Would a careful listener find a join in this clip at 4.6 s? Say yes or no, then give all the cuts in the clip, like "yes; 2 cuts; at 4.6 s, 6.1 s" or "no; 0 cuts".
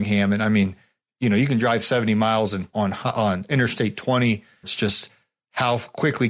yes; 2 cuts; at 2.7 s, 4.6 s